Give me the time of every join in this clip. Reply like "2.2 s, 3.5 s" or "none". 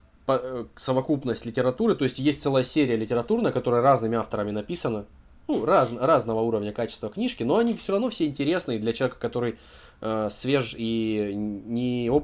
none